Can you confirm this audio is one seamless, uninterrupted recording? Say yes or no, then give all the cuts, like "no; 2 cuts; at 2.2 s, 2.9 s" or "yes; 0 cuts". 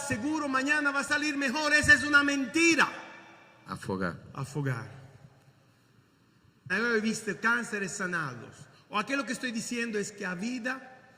no; 3 cuts; at 3.6 s, 6.7 s, 8.7 s